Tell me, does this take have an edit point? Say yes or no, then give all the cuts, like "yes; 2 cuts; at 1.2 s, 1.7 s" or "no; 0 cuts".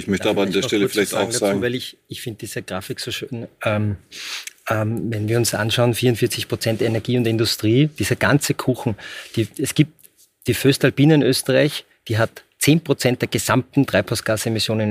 no; 0 cuts